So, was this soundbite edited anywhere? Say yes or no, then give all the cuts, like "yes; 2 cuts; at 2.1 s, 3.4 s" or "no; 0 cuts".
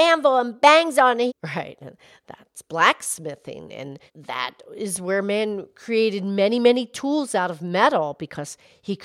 yes; 2 cuts; at 1.3 s, 4.1 s